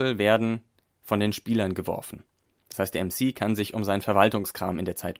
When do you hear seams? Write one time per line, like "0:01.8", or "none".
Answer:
none

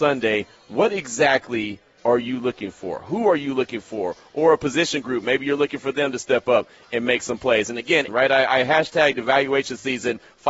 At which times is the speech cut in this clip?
0:08.1

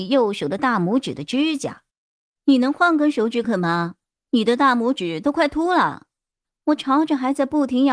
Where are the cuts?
0:03.4

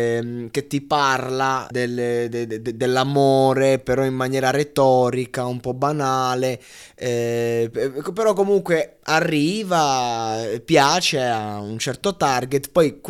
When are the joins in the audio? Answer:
0:01.7

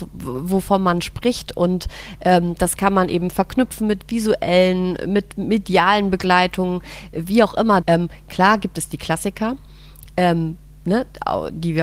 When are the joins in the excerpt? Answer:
0:07.8

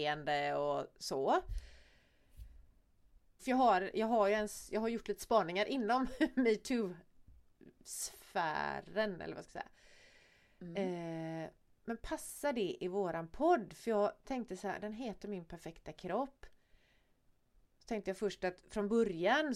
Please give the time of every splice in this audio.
0:03.4

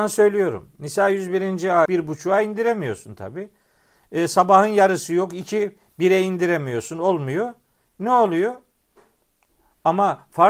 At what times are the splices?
0:01.9

